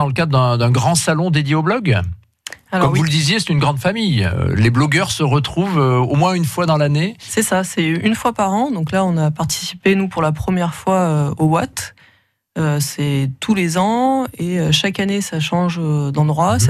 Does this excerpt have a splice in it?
no; 0 cuts

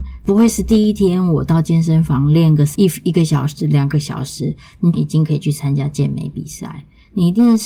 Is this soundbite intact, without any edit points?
yes; 0 cuts

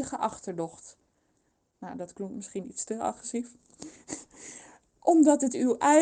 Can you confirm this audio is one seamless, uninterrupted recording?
no; 1 cut; at 1.7 s

